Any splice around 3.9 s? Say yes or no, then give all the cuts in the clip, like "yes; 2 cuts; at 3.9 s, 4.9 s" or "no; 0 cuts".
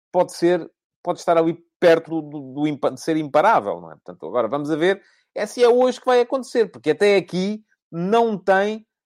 no; 1 cut; at 2.1 s